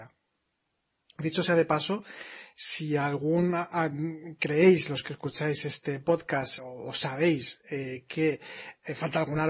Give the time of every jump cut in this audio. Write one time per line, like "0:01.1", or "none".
0:06.6